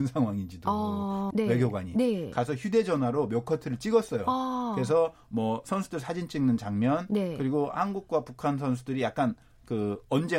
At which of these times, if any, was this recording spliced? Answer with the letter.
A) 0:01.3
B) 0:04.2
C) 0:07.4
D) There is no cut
A